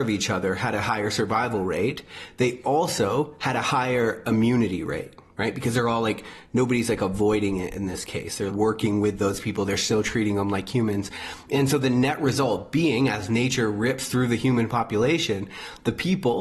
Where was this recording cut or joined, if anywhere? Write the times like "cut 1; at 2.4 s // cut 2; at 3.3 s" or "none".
cut 1; at 8.5 s